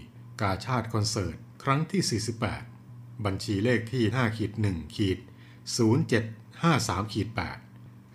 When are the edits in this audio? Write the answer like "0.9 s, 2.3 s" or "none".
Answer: 4.1 s, 6.9 s